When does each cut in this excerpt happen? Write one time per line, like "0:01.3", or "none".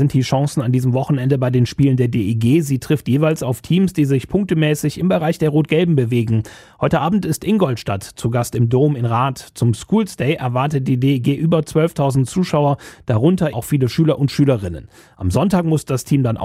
0:13.5